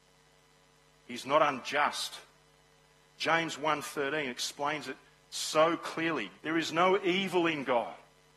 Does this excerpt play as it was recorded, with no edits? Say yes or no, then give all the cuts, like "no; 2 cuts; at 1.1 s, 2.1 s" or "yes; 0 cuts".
no; 1 cut; at 6.4 s